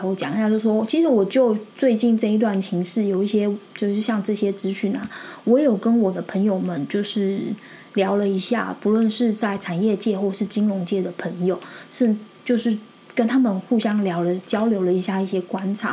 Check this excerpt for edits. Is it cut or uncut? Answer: uncut